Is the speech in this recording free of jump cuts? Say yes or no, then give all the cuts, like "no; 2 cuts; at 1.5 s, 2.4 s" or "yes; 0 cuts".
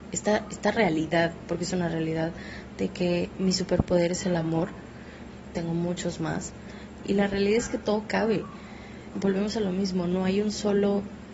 no; 3 cuts; at 5.5 s, 7.0 s, 9.1 s